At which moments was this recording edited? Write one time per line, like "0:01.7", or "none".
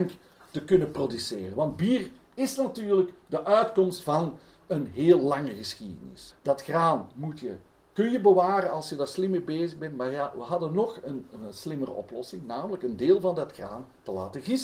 0:06.3